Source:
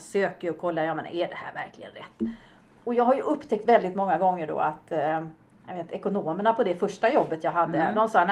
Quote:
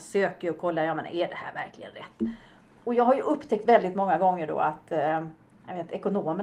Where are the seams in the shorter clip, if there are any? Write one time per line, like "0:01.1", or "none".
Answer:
none